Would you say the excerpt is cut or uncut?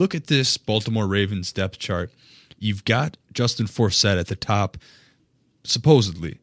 uncut